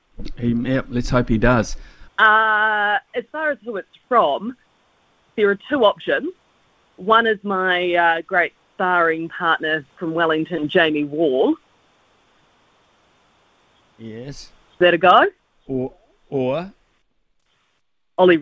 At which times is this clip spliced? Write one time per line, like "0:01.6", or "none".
0:02.1